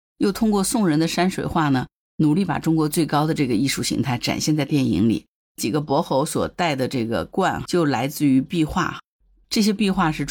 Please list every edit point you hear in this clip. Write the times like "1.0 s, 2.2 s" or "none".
2.1 s, 5.4 s